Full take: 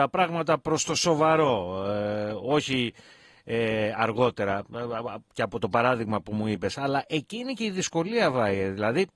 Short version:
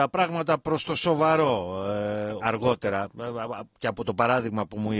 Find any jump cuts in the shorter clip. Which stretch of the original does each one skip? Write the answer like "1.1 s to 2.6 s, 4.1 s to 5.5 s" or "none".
2.4 s to 4.0 s